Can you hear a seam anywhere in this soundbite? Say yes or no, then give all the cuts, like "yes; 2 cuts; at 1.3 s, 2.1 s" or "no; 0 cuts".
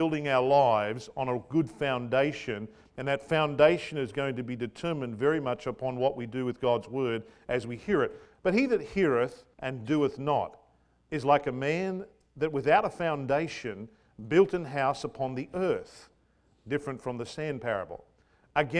yes; 2 cuts; at 8.3 s, 9.5 s